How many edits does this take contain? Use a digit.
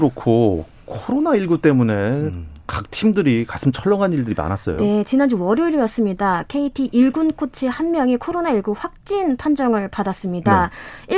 0